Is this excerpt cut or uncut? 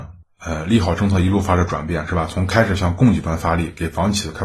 uncut